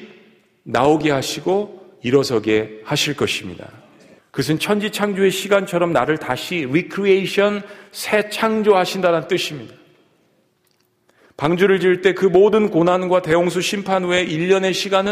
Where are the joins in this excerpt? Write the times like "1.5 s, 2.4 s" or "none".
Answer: 4.2 s